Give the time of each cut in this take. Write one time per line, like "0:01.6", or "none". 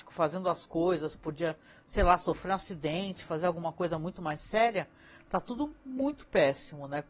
none